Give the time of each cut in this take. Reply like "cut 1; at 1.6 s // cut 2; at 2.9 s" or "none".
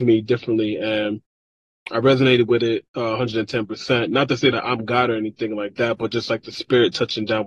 none